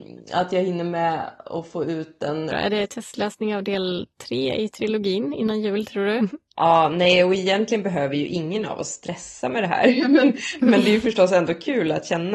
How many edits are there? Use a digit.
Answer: 2